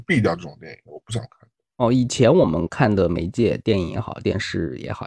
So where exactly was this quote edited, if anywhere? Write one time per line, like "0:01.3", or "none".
none

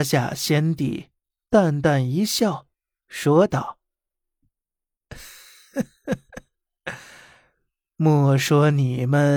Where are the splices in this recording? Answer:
none

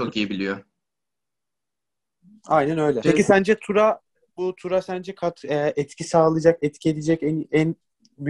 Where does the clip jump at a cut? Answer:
0:03.0

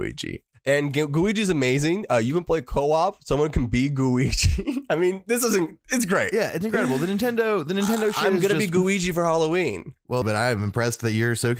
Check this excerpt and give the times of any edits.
0:10.2

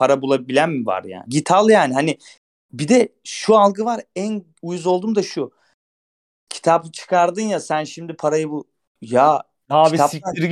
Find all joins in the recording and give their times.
0:01.3

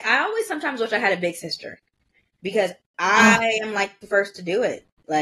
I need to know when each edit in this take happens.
none

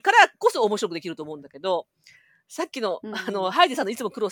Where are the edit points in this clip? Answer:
none

